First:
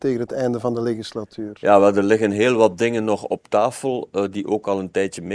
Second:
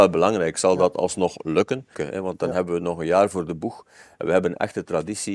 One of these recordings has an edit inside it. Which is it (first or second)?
second